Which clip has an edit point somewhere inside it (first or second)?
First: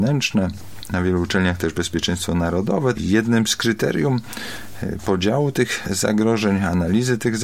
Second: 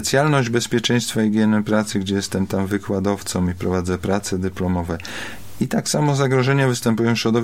first